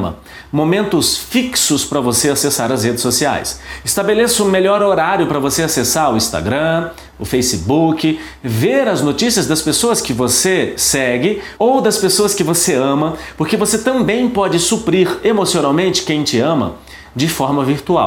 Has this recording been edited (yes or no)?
yes